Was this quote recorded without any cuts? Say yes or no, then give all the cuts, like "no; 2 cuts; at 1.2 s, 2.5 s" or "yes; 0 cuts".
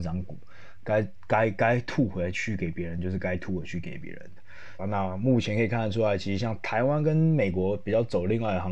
no; 1 cut; at 4.8 s